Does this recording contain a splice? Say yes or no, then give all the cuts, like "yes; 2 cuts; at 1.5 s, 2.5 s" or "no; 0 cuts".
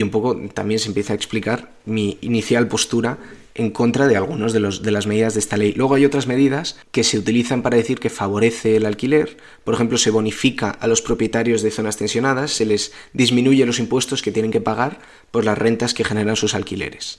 yes; 1 cut; at 6.8 s